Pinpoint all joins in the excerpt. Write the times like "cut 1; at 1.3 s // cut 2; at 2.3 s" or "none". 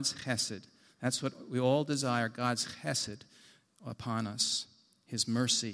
none

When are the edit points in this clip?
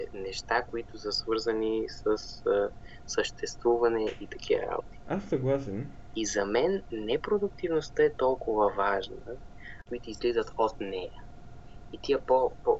cut 1; at 5.0 s // cut 2; at 6.1 s // cut 3; at 9.9 s

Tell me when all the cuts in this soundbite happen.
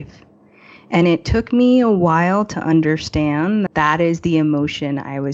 cut 1; at 3.7 s

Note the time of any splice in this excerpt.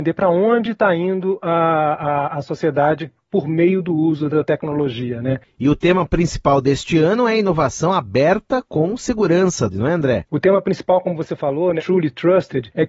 cut 1; at 9.7 s // cut 2; at 11.8 s

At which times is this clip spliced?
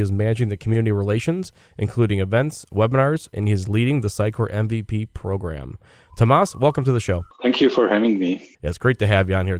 cut 1; at 3.3 s

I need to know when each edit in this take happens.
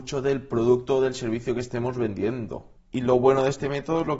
cut 1; at 2.8 s

